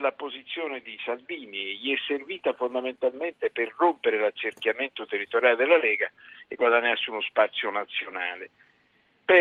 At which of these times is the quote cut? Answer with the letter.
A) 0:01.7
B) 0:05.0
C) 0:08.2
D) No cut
D